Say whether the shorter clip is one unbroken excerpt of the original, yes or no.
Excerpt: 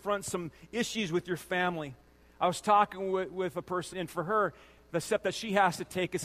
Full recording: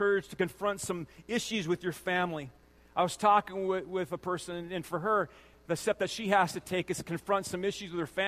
no